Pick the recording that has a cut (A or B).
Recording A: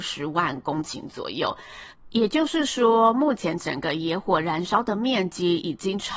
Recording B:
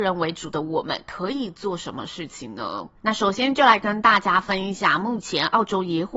B